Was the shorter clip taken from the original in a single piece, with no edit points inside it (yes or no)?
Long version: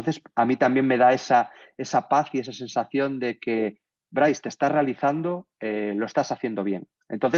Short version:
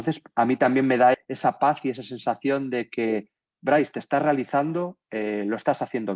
no